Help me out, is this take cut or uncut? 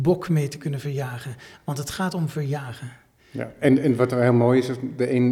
uncut